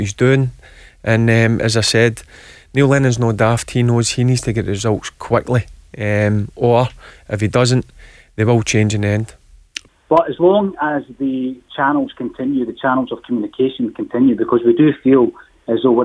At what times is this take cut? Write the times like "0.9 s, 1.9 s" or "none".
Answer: 9.9 s